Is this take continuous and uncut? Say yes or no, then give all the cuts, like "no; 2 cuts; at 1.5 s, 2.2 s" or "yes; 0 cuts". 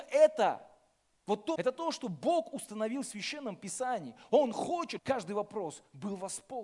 no; 2 cuts; at 1.6 s, 5.0 s